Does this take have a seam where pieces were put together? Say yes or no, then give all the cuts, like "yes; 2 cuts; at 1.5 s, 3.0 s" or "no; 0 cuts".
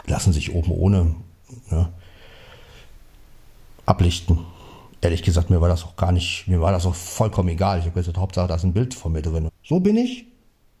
yes; 1 cut; at 9.5 s